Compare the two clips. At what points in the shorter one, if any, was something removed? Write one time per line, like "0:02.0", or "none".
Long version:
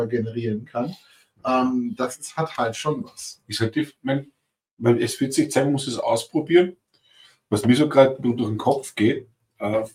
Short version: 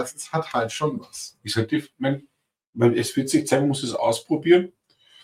none